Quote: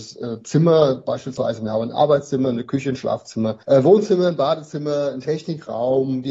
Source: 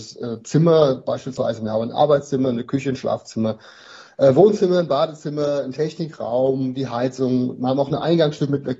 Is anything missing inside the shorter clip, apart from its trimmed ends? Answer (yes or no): yes